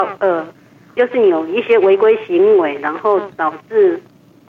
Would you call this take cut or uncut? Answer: cut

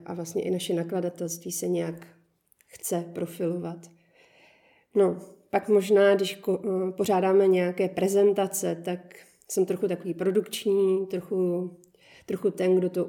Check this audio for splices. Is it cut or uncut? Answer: uncut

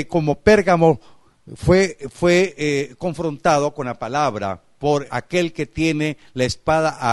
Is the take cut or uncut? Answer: cut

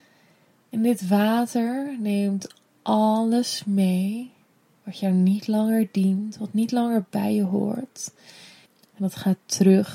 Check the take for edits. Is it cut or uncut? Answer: cut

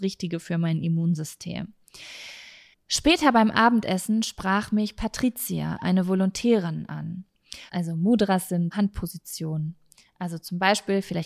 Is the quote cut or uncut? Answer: cut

